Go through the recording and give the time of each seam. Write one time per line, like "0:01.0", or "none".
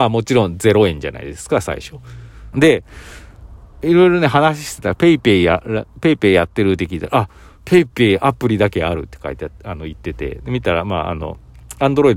0:02.5